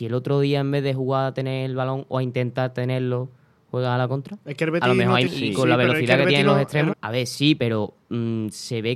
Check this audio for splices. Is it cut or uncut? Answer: cut